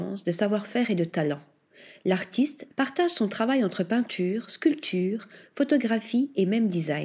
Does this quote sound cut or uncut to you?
cut